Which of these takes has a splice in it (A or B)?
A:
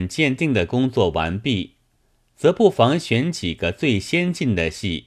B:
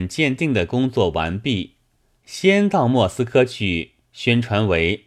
B